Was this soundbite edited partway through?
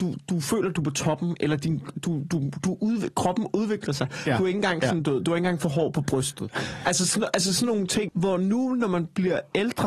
yes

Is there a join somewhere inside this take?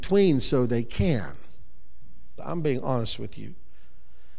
yes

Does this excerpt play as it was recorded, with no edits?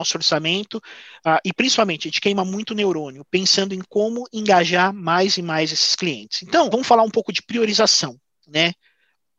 no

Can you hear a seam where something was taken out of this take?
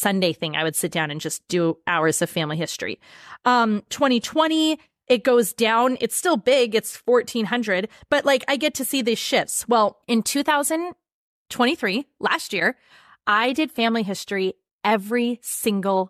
yes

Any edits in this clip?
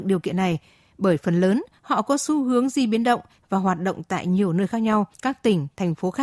yes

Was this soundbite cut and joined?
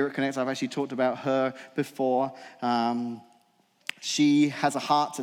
no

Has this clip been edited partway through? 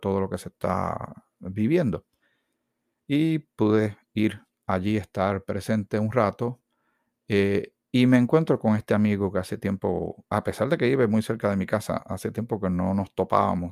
no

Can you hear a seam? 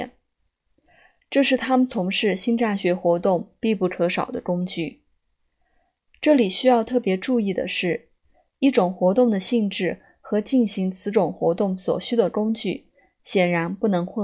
no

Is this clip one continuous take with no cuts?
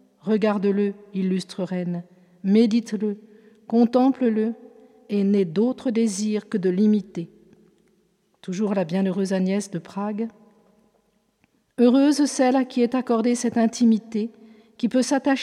yes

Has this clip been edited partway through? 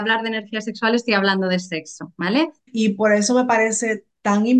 yes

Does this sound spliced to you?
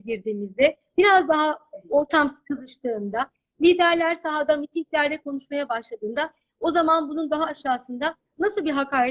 no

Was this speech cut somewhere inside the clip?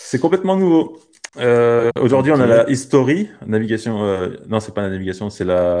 no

